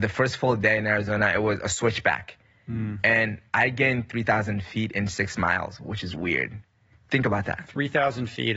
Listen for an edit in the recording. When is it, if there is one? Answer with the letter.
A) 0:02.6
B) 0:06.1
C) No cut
B